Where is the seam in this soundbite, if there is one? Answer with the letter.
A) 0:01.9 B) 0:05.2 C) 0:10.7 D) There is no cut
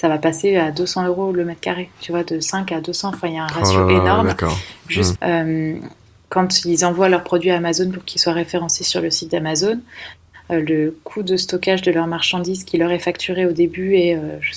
B